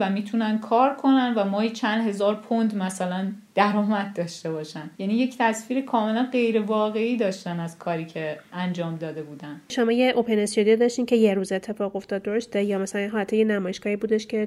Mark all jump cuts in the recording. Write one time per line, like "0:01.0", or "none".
0:04.9

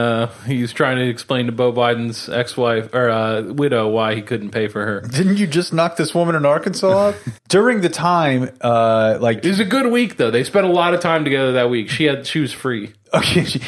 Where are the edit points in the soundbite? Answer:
0:07.4

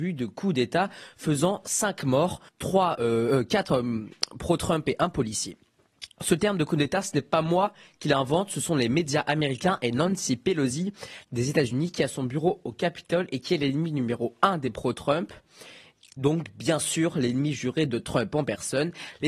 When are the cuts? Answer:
0:02.5
0:11.2

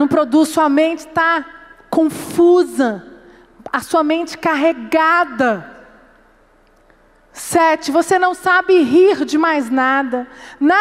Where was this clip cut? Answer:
none

